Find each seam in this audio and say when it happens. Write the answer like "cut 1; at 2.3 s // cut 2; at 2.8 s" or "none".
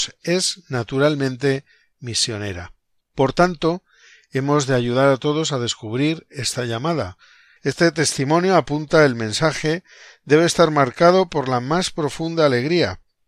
cut 1; at 3.0 s // cut 2; at 7.6 s